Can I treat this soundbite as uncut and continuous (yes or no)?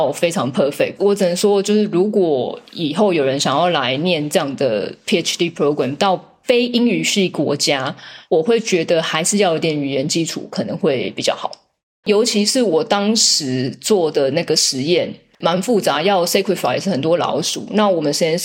no